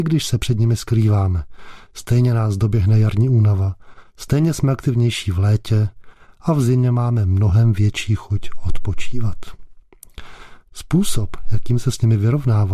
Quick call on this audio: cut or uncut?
cut